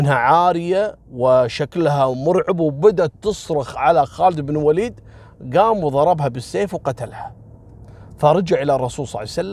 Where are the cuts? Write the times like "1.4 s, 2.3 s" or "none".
1.0 s